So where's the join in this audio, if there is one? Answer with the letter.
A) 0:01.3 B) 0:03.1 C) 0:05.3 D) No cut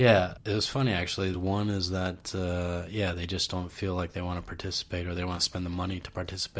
A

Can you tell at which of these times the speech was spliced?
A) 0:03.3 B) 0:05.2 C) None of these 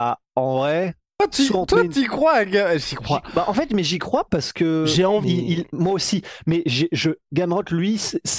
B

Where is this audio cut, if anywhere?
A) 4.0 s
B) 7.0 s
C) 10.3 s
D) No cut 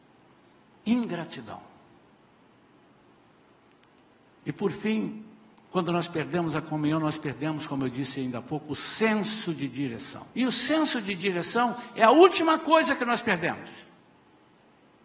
C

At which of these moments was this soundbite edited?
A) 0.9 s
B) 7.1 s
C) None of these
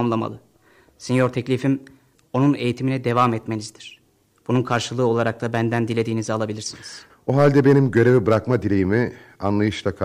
B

